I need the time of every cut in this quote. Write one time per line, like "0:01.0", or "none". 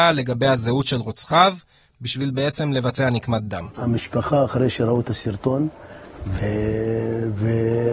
0:06.4